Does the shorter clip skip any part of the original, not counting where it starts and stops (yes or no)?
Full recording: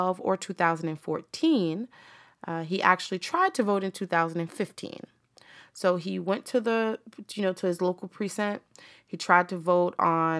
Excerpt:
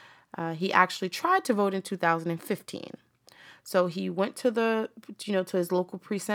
no